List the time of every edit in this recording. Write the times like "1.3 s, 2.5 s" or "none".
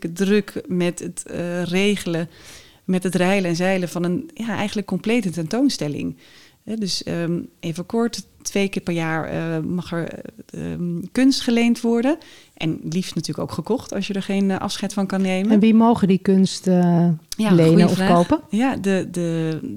none